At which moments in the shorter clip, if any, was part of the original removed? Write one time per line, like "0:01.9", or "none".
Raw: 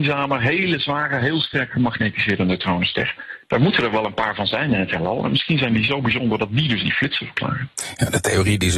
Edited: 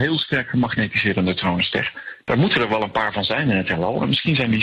none